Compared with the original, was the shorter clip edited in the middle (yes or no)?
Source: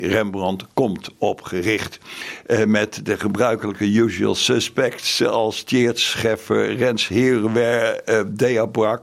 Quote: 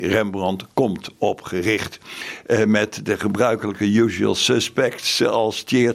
no